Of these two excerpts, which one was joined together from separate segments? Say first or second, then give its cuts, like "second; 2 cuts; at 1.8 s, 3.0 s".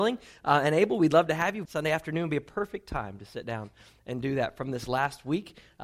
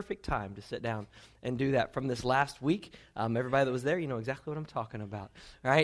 first; 1 cut; at 1.7 s